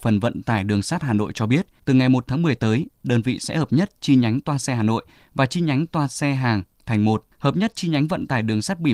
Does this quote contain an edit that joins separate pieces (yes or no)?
yes